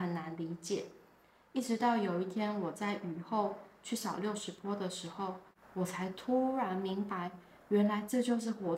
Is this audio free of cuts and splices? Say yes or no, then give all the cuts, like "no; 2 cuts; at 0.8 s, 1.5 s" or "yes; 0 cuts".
no; 1 cut; at 5.6 s